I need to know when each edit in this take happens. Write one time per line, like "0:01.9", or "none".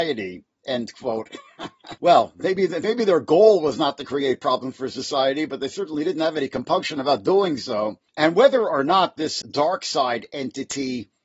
0:02.0
0:08.1
0:09.4